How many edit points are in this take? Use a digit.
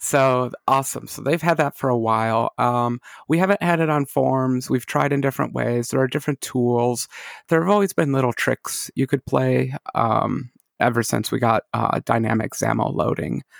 0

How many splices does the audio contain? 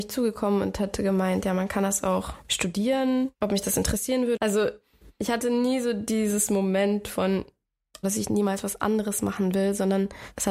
3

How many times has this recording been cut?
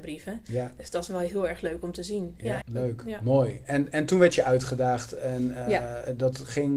1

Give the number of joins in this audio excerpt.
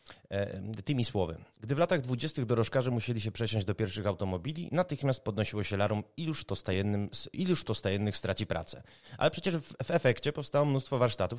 0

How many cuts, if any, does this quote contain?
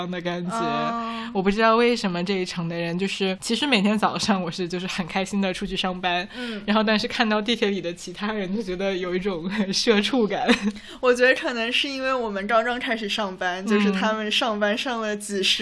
0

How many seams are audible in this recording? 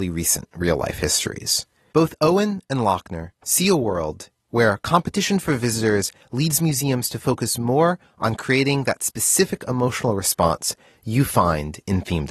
1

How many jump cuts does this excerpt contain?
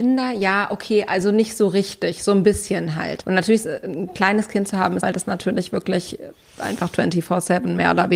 2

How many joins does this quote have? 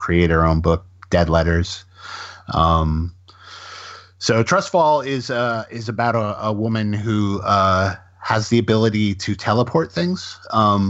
0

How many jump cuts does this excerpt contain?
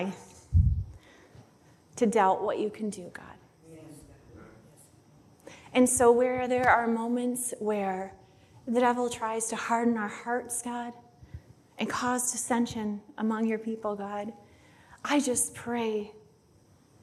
0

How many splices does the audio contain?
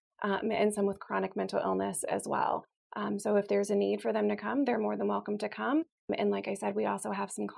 0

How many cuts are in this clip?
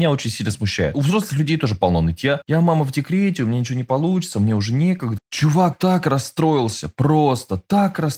1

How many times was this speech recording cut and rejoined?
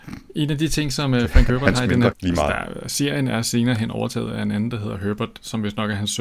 1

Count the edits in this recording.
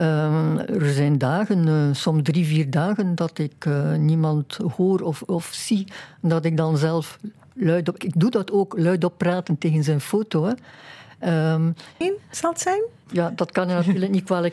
2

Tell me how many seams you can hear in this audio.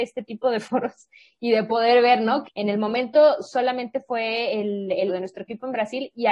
2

